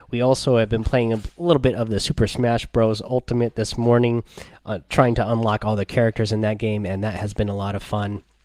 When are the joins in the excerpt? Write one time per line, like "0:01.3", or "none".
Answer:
none